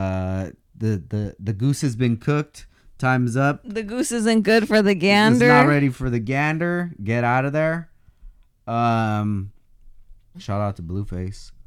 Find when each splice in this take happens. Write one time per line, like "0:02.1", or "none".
0:10.3